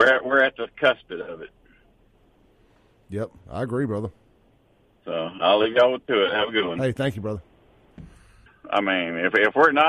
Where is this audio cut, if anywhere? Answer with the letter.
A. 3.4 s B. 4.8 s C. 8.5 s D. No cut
C